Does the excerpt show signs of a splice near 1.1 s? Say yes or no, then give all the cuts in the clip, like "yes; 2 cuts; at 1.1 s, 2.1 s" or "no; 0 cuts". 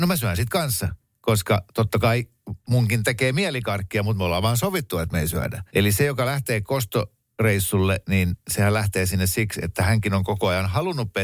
no; 1 cut; at 5.7 s